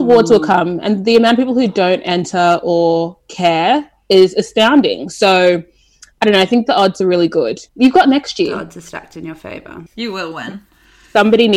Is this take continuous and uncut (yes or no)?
no